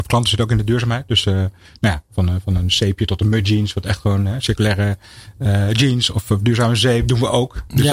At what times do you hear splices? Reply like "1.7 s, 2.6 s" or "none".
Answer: none